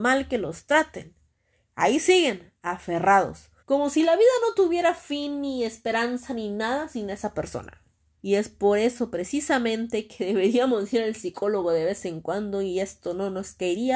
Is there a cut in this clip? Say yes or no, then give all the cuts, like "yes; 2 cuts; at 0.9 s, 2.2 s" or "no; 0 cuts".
yes; 2 cuts; at 3.6 s, 8.1 s